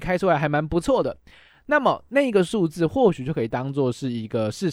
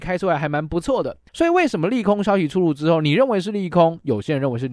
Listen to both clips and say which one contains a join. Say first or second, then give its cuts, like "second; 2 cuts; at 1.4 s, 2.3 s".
second; 1 cut; at 1.3 s